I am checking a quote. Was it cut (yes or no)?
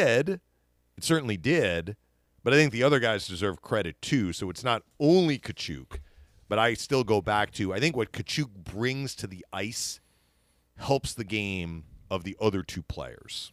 no